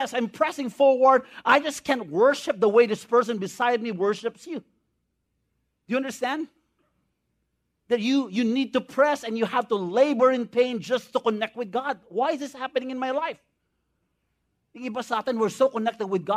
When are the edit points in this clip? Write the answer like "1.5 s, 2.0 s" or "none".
none